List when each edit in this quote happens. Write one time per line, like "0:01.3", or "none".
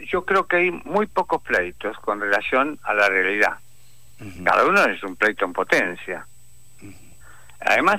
0:04.4